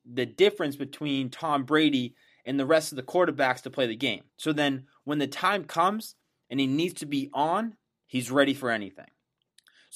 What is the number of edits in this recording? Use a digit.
1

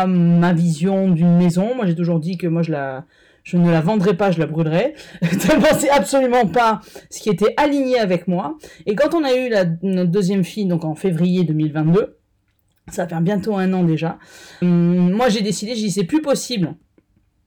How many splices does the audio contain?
1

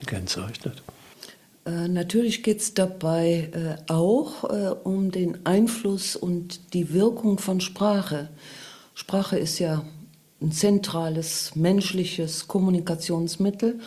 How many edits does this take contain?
0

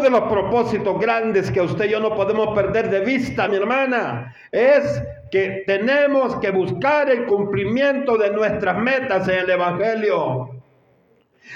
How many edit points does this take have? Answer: 1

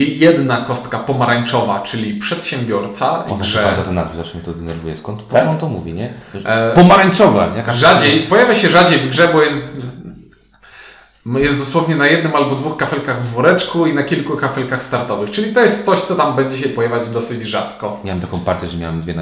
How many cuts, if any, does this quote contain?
1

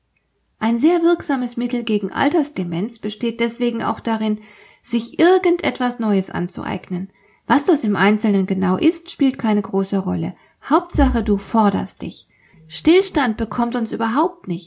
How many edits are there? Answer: 1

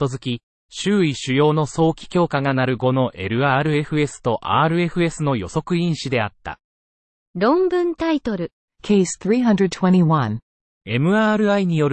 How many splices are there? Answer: 3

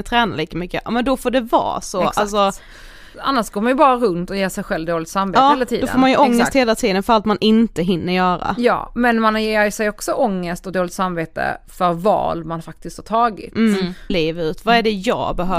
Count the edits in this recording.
2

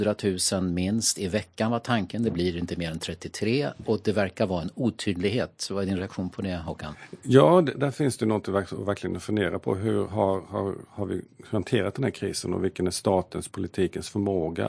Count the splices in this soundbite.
1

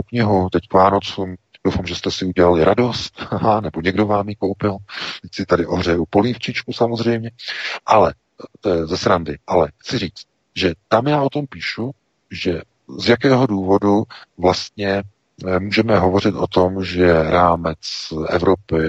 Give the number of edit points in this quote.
1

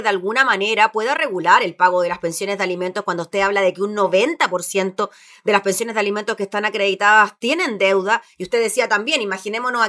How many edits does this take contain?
0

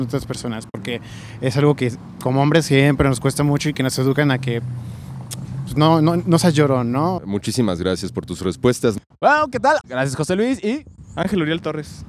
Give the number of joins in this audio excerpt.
2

